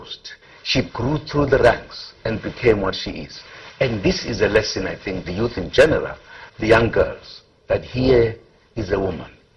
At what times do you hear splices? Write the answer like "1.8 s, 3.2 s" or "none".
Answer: 5.2 s, 6.5 s